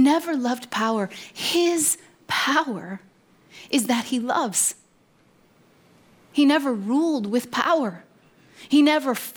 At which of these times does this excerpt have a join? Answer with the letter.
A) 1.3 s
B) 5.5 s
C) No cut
C